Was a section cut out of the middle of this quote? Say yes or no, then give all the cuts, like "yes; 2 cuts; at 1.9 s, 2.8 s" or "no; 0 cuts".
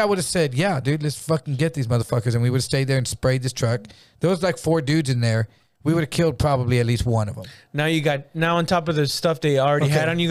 no; 0 cuts